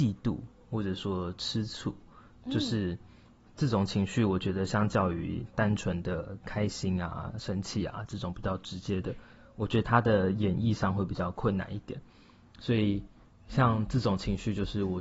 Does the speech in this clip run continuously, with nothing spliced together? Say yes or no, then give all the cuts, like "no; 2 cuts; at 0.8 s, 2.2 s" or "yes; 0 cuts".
yes; 0 cuts